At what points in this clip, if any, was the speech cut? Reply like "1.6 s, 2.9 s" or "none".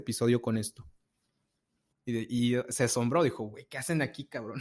1.9 s